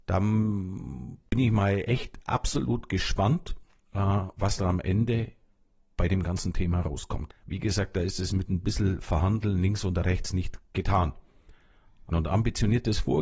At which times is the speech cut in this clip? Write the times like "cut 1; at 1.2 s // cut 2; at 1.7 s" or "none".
cut 1; at 7.3 s // cut 2; at 12.1 s